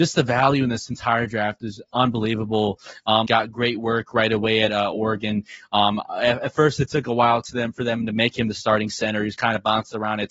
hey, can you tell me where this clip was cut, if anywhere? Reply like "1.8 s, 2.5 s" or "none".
3.3 s